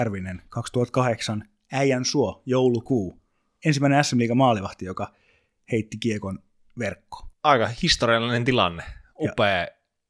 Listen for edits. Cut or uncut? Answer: uncut